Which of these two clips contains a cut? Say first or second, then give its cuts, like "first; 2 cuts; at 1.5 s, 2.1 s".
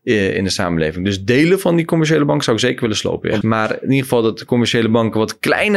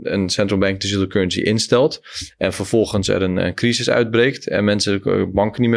first; 1 cut; at 3.4 s